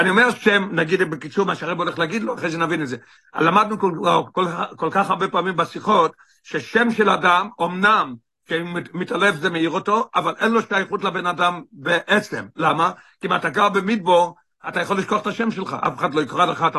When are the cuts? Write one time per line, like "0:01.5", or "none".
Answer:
none